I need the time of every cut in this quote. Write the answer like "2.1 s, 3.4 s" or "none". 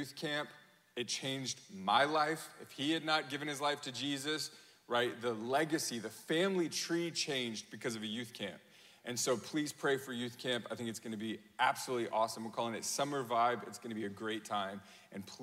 none